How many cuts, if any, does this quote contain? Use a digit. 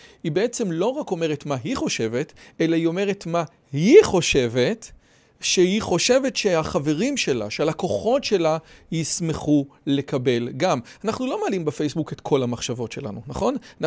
0